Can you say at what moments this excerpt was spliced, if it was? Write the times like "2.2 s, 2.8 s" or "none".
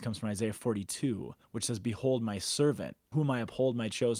1.4 s, 3.1 s